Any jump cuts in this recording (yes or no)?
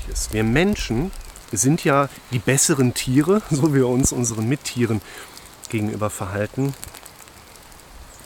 no